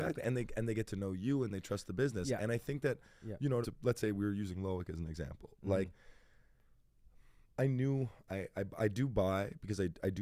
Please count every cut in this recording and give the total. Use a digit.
1